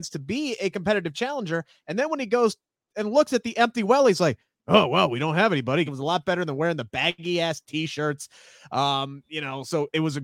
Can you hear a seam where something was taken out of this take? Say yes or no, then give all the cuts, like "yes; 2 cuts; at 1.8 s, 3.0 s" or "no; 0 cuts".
yes; 1 cut; at 5.9 s